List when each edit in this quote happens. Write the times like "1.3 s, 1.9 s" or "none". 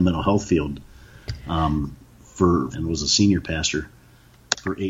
2.7 s